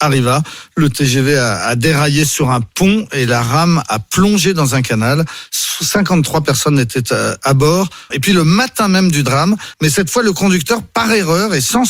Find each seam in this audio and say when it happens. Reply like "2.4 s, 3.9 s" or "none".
8.1 s, 9.7 s